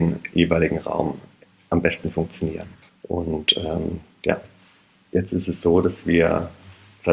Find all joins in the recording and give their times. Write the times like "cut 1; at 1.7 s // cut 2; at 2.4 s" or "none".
cut 1; at 2.9 s